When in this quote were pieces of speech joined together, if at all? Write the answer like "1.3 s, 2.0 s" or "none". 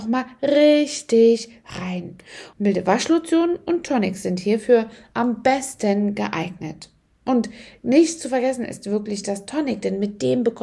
2.5 s